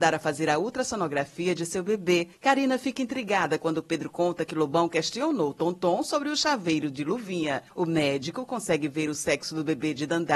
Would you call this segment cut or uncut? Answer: uncut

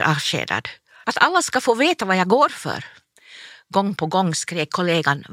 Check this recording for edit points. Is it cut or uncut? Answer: cut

